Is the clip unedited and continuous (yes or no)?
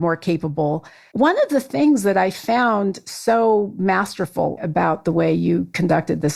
no